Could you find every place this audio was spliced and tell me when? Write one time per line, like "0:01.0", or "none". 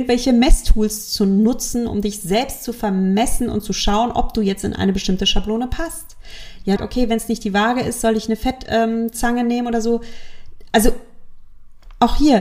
0:06.8